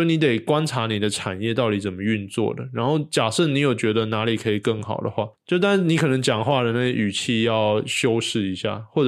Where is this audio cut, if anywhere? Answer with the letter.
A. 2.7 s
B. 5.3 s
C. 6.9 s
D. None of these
B